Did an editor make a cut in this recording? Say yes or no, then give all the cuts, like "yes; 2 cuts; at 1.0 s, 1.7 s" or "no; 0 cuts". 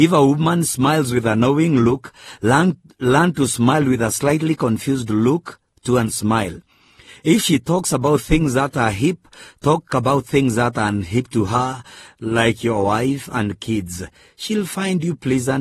no; 0 cuts